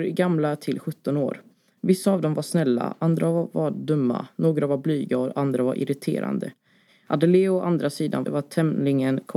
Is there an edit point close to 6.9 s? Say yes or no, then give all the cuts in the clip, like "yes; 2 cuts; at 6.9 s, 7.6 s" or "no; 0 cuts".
yes; 2 cuts; at 6.9 s, 8.2 s